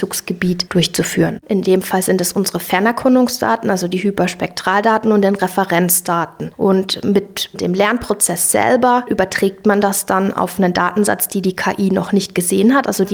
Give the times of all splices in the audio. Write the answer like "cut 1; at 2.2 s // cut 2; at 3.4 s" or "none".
cut 1; at 1.4 s